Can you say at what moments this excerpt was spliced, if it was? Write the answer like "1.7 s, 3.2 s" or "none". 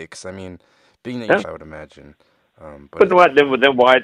1.4 s, 3.1 s